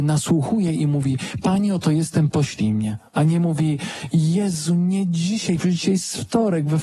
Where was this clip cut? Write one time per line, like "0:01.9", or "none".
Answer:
0:03.1